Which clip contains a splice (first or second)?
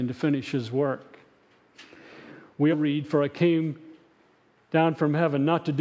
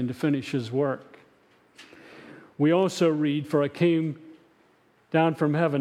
first